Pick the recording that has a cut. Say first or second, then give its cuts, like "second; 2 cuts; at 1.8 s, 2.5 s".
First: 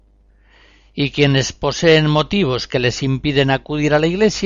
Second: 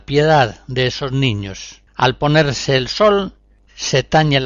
second; 1 cut; at 1.9 s